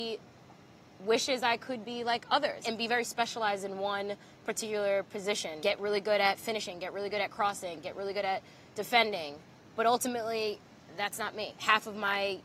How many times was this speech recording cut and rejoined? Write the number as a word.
zero